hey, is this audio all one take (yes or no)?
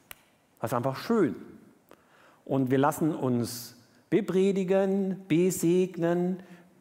yes